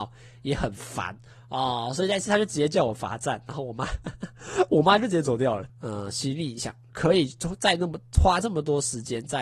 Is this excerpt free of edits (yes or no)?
no